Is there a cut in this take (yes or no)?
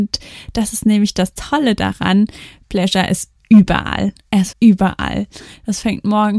yes